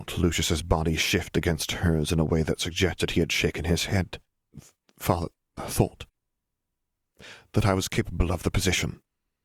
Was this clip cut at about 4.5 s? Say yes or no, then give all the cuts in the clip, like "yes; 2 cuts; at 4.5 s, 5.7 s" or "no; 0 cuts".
yes; 1 cut; at 4.5 s